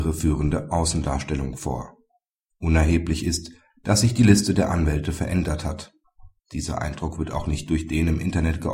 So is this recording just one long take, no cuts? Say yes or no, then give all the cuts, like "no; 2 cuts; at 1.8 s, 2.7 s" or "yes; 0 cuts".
no; 1 cut; at 6.4 s